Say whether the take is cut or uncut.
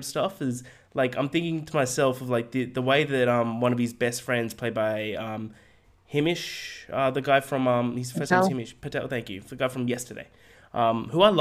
uncut